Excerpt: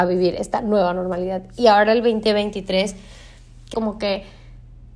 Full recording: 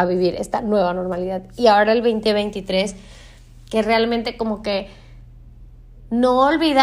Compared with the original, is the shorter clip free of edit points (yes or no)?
no